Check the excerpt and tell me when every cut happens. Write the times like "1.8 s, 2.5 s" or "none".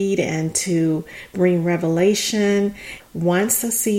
3.0 s